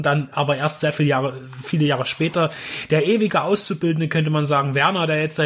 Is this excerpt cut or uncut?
uncut